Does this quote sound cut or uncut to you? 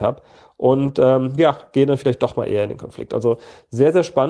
uncut